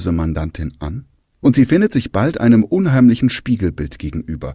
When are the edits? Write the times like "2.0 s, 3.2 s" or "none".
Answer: 1.4 s

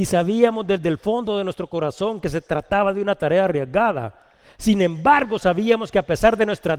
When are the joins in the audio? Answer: none

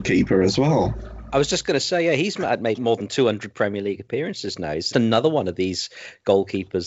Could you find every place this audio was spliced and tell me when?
2.8 s, 4.9 s

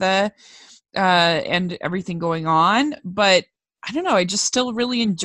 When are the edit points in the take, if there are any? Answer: none

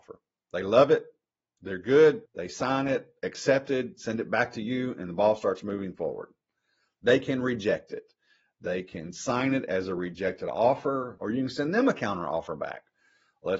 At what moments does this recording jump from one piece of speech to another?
2.3 s, 11.2 s

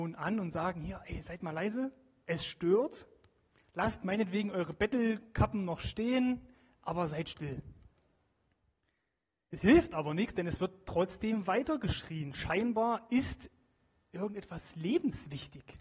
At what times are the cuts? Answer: none

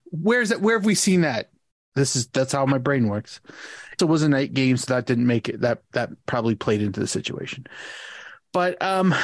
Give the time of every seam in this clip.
1.9 s, 4.0 s

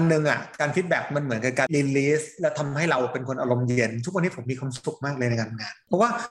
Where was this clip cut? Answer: 1.7 s

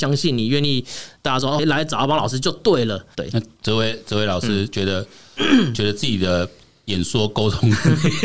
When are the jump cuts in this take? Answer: 1.6 s, 3.1 s

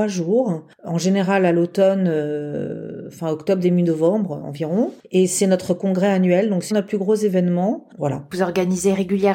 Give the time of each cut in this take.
4.4 s, 6.7 s, 8.0 s

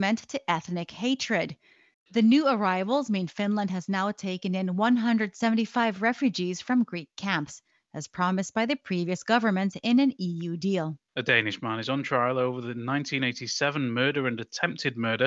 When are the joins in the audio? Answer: 1.9 s, 11.1 s

